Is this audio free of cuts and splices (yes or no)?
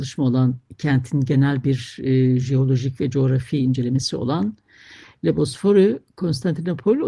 yes